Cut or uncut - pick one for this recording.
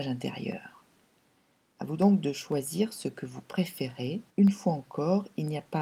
cut